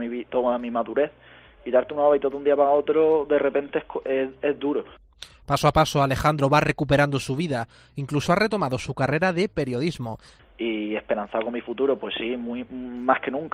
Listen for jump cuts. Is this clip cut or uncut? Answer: cut